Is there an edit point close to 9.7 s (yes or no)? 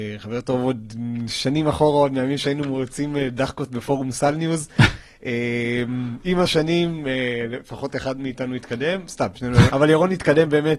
yes